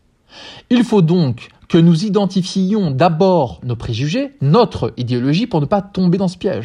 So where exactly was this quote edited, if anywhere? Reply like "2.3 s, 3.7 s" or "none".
none